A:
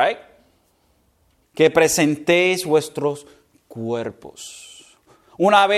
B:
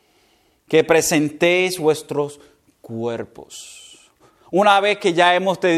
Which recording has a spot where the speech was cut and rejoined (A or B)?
A